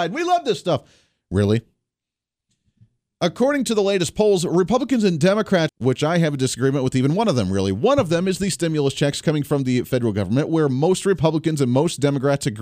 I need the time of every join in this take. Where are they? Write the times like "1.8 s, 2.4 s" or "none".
5.7 s